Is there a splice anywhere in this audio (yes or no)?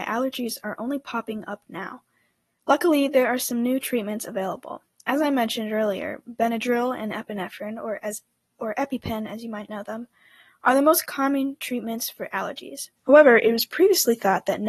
yes